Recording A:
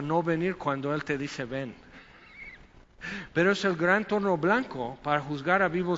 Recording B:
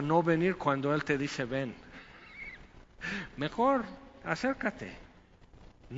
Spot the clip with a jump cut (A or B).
A